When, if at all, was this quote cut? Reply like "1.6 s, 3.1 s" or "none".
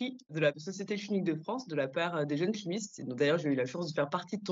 none